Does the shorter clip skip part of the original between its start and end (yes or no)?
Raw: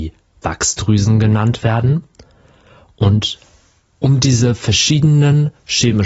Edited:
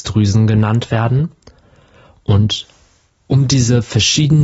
no